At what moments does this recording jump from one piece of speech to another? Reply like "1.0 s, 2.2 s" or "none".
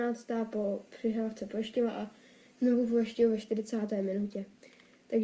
none